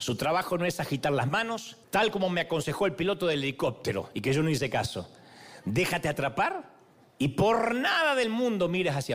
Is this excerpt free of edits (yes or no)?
no